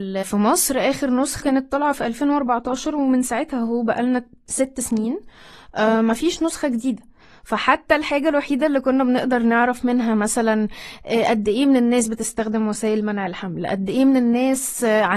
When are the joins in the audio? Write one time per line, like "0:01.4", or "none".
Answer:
none